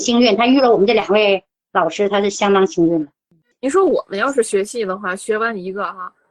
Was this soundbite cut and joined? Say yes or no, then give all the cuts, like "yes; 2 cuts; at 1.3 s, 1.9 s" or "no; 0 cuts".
no; 0 cuts